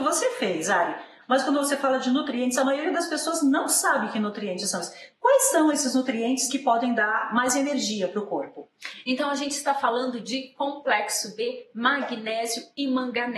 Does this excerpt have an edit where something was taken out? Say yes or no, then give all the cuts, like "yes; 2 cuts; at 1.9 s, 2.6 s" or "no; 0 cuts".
no; 0 cuts